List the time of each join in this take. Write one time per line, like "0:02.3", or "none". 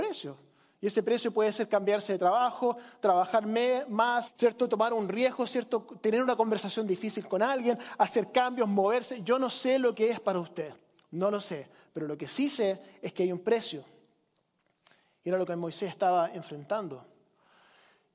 0:04.3